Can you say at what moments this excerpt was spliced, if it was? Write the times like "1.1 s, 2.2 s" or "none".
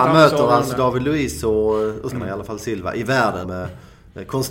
2.1 s, 3.4 s